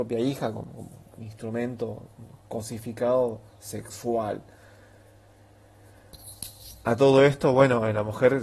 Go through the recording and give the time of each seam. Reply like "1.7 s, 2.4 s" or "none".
none